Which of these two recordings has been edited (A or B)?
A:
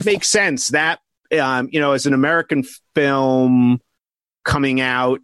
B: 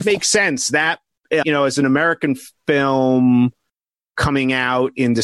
B